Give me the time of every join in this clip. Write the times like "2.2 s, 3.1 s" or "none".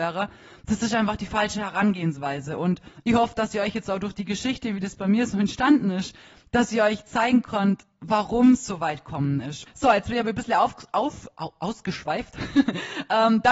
9.7 s